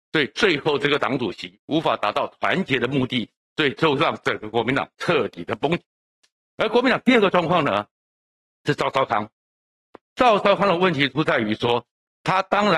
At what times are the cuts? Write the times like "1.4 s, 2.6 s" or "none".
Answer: 3.5 s